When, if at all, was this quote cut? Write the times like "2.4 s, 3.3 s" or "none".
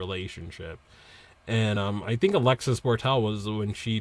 none